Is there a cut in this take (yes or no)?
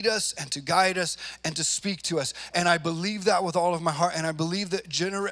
no